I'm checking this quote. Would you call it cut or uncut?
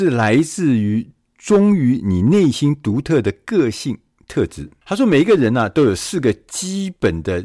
cut